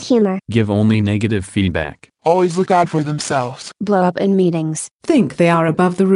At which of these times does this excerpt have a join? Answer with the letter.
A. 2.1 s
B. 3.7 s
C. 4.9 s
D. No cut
C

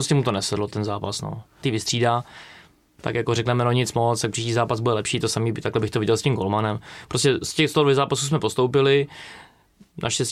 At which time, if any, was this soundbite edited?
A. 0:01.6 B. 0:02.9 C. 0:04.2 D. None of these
A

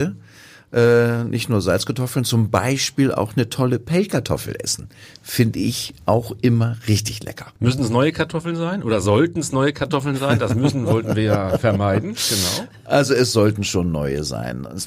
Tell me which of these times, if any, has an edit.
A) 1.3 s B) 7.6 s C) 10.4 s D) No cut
B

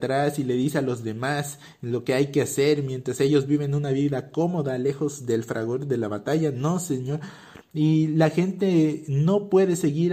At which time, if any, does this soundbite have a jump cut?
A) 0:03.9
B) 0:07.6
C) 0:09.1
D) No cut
B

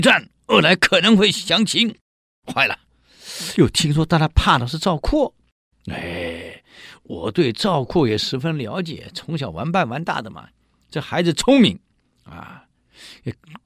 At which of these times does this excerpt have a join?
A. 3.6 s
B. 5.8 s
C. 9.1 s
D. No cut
D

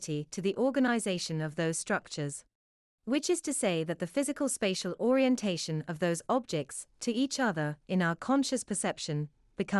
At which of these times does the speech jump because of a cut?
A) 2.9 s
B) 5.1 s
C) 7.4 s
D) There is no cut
A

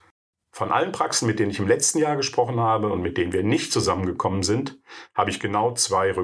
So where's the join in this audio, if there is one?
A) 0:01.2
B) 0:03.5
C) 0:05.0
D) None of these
D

